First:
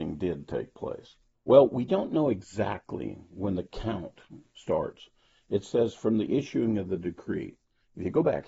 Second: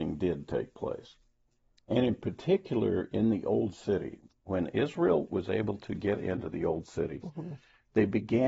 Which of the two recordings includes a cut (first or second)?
first